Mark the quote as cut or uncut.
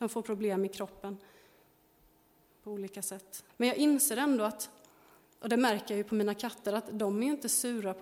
cut